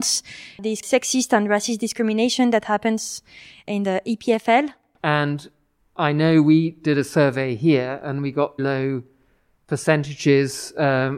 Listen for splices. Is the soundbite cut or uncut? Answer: cut